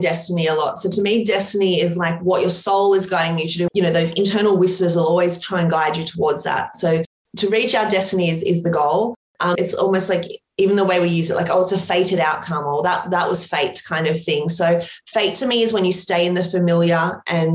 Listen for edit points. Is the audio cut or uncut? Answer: cut